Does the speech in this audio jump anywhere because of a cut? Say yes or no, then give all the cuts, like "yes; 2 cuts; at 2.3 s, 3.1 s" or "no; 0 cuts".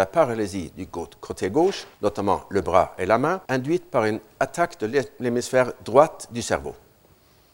yes; 2 cuts; at 1.9 s, 3.5 s